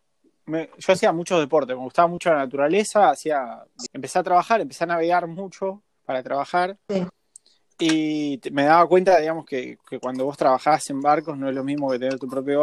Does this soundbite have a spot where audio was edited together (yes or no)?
yes